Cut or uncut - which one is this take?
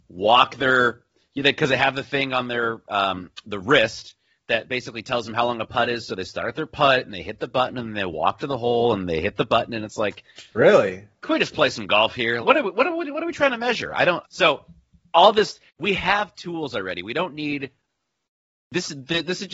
cut